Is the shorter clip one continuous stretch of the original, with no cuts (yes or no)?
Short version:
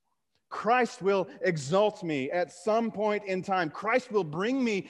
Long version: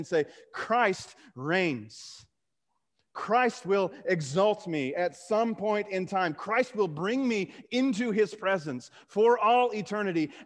yes